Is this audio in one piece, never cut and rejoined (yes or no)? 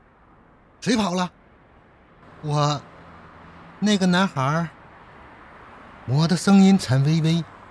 no